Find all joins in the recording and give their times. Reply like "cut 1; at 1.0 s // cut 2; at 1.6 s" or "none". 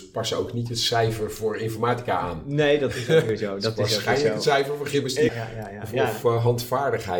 cut 1; at 5.3 s